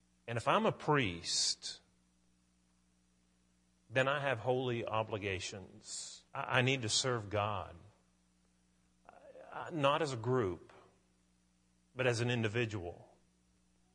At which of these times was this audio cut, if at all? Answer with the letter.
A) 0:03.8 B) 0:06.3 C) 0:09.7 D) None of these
B